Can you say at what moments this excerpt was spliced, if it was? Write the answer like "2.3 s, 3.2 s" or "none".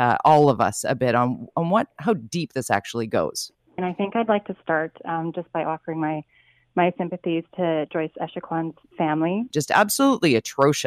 3.8 s, 9.5 s